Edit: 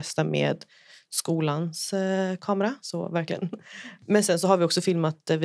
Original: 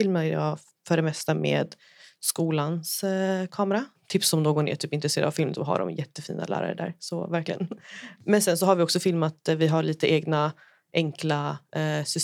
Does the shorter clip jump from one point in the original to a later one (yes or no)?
yes